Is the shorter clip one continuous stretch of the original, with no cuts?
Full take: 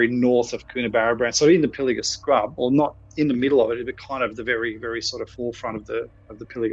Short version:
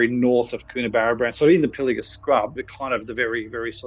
no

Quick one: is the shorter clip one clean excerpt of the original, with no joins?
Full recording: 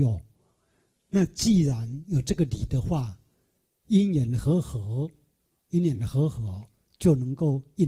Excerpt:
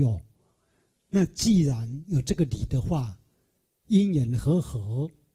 yes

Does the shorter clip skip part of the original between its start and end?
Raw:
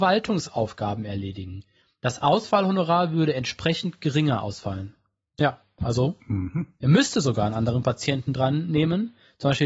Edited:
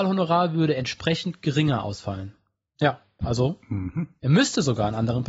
no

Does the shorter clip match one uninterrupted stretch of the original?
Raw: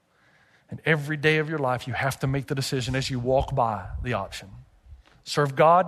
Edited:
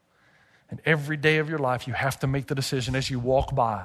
yes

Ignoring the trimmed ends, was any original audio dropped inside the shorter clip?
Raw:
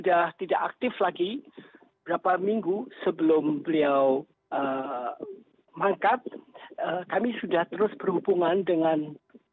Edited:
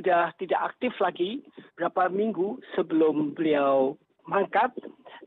yes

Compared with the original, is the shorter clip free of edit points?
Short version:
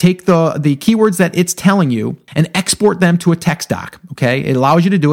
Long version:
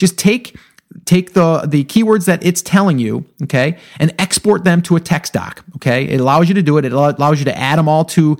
no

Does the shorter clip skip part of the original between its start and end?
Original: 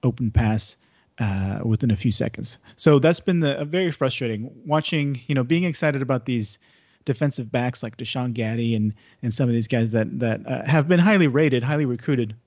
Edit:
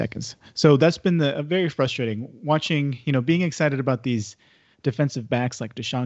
no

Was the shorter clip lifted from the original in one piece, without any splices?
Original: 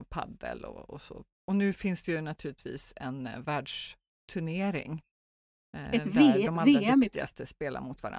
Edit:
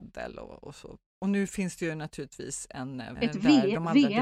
no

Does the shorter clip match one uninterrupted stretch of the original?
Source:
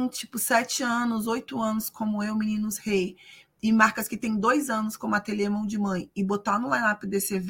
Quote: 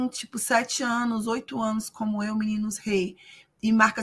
yes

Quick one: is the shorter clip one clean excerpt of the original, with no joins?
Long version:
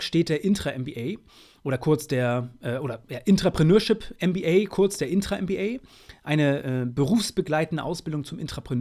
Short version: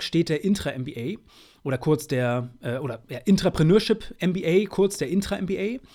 yes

